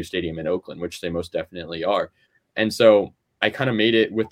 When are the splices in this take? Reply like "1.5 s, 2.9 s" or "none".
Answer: none